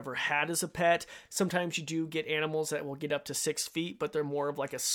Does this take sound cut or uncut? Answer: cut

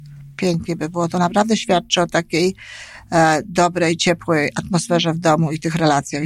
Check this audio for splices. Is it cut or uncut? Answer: uncut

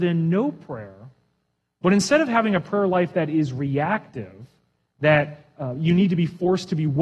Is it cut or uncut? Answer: uncut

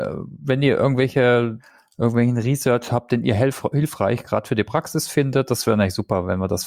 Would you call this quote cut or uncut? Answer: uncut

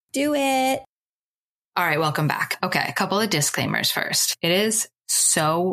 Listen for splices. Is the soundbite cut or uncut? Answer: uncut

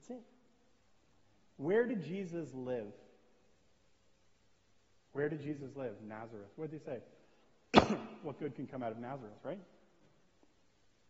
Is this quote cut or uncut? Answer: uncut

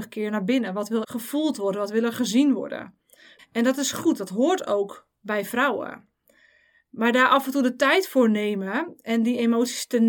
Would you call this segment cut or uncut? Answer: cut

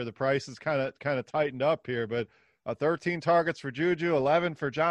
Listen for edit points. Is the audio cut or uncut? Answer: uncut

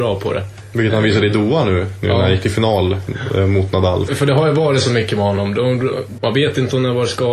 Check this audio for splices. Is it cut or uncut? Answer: cut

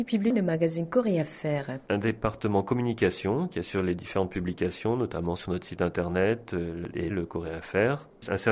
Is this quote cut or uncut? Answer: cut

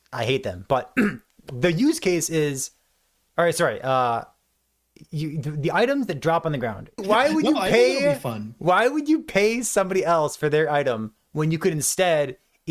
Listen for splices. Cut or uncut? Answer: cut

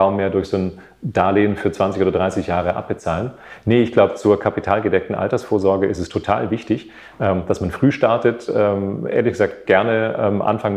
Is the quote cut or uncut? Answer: uncut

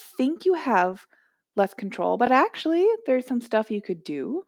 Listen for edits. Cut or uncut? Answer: uncut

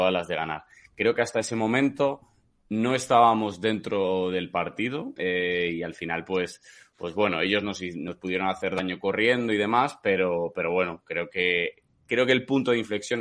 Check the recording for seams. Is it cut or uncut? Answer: cut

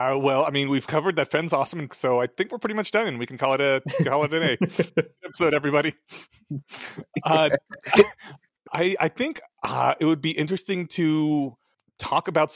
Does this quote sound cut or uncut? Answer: cut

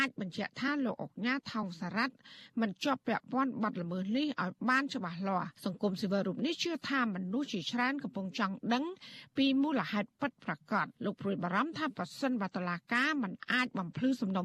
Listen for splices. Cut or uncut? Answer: cut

